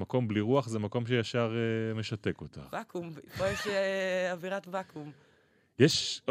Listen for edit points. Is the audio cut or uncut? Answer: uncut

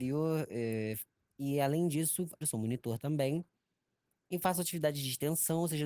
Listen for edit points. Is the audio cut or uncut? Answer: cut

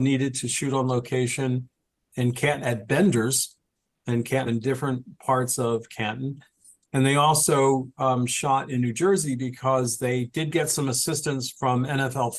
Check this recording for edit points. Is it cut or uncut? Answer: cut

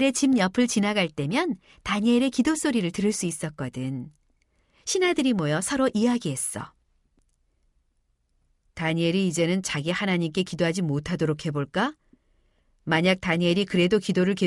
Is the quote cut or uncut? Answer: cut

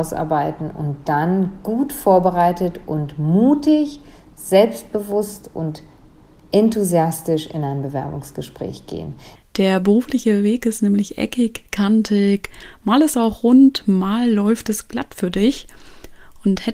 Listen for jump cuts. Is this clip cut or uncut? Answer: cut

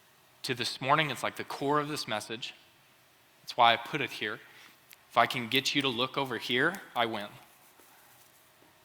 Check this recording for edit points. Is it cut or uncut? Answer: cut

